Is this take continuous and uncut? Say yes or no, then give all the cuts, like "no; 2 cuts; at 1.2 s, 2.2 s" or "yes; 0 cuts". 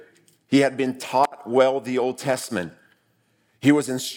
yes; 0 cuts